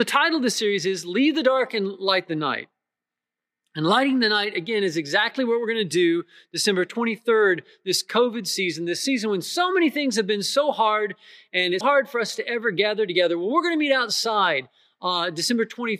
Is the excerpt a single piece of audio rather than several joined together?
no; 1 cut; at 11.8 s

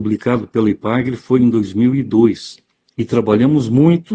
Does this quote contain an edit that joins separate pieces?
yes; 1 cut; at 2.9 s

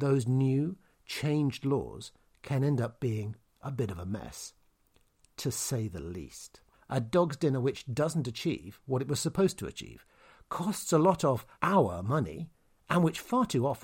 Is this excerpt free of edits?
no; 2 cuts; at 6.7 s, 11.5 s

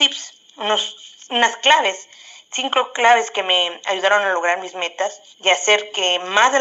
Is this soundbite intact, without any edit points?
no; 1 cut; at 5.3 s

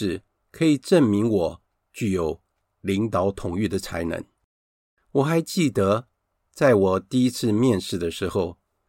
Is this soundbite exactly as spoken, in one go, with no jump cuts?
yes; 0 cuts

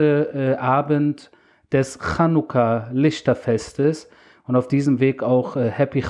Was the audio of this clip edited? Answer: no; 0 cuts

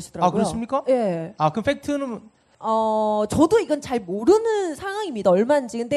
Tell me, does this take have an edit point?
no; 0 cuts

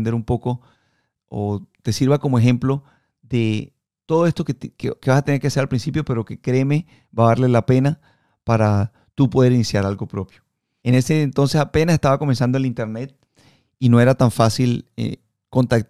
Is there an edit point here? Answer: yes; 1 cut; at 10.8 s

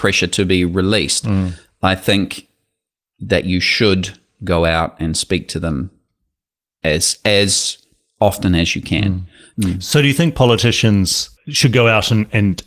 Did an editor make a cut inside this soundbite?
yes; 2 cuts; at 9.5 s, 11.4 s

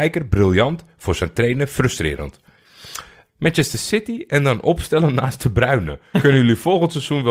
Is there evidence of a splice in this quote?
yes; 2 cuts; at 3.3 s, 6.1 s

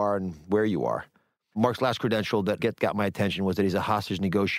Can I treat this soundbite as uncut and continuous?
no; 2 cuts; at 1.5 s, 2.6 s

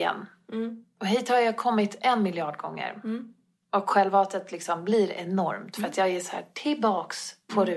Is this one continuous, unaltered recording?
yes; 0 cuts

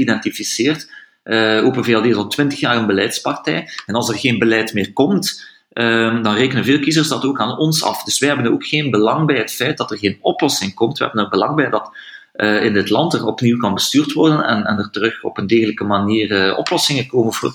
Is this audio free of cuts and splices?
yes; 0 cuts

